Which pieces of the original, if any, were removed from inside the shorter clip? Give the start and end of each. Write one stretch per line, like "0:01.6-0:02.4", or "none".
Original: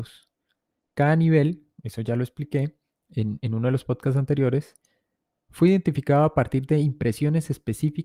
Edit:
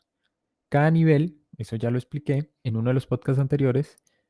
0:02.9-0:03.4